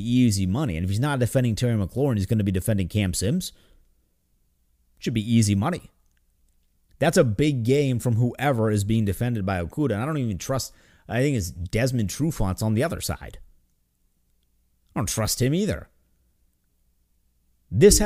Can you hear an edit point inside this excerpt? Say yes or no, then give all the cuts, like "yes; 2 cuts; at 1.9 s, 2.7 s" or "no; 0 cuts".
no; 0 cuts